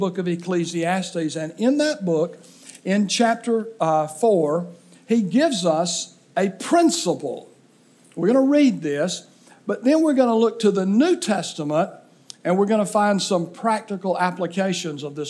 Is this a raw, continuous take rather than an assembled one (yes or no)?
yes